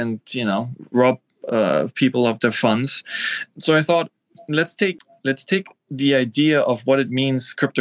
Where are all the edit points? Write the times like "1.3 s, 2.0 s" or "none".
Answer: 3.5 s